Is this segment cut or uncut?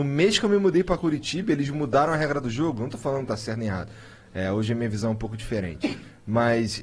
uncut